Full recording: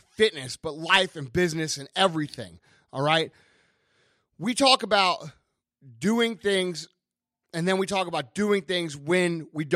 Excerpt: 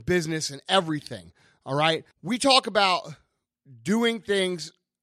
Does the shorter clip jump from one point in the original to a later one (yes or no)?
yes